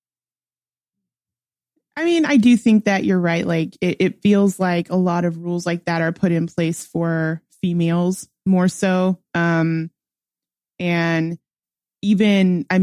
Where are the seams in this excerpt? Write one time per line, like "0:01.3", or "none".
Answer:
none